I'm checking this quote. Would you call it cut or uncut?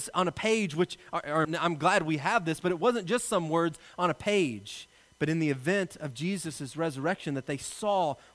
cut